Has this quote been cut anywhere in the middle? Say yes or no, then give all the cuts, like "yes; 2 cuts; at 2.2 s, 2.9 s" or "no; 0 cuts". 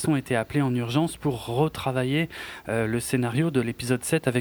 no; 0 cuts